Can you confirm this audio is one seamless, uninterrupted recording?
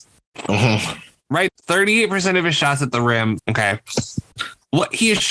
no; 2 cuts; at 1.5 s, 3.4 s

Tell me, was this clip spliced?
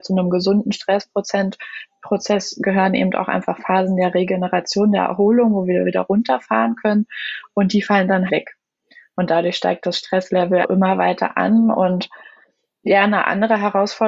yes; 2 cuts; at 8.3 s, 10.6 s

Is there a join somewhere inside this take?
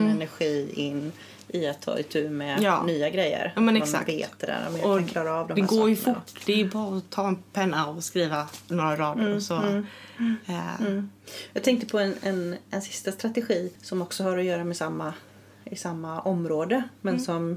yes; 1 cut; at 13.8 s

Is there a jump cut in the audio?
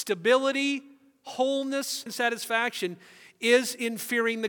yes; 1 cut; at 2.1 s

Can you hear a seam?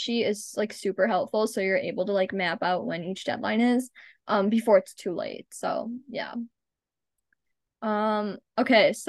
no; 0 cuts

